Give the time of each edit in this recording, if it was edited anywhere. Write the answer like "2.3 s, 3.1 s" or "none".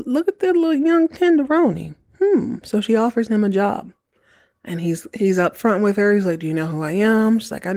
none